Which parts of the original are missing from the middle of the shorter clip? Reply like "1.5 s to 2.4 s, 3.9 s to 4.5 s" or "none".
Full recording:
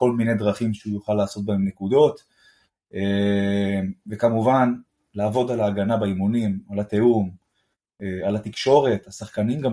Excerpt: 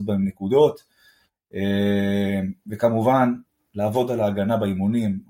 none